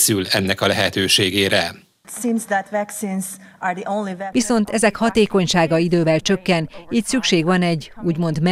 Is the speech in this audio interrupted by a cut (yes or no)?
yes